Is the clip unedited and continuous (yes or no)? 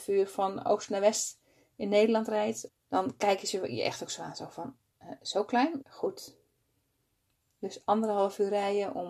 no